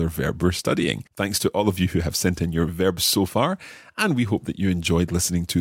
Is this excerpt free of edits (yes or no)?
no